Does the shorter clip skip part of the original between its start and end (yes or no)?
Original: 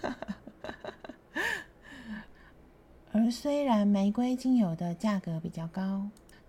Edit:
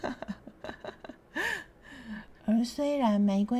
yes